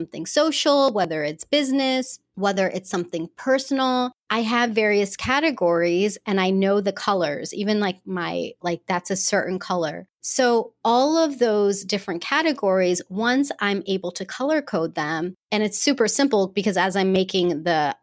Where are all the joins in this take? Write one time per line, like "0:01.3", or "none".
0:08.6

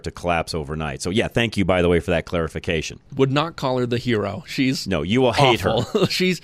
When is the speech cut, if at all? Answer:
0:03.1

